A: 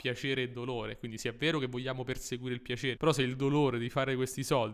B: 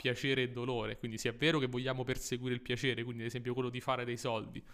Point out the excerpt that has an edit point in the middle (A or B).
A